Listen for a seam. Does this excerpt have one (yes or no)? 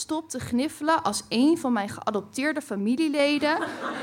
no